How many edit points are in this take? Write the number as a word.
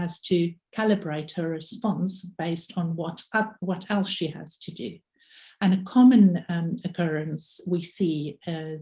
zero